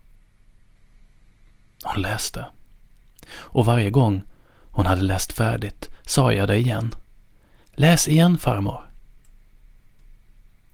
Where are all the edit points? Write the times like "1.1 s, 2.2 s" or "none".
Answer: none